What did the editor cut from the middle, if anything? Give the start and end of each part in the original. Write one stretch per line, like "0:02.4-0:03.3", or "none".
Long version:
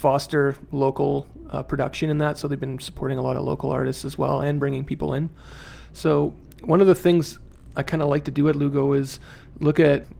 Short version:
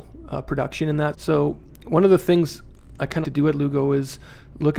0:02.3-0:05.9
0:08.0-0:08.2